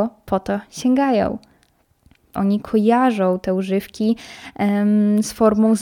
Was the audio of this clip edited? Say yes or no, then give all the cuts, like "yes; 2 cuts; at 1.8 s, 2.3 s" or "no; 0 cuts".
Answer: yes; 1 cut; at 2.3 s